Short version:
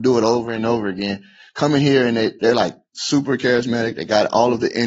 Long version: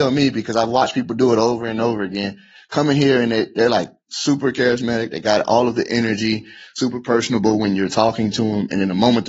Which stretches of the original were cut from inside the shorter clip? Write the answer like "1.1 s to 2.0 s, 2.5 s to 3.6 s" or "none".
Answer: none